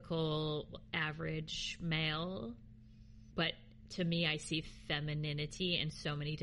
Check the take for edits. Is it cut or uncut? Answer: uncut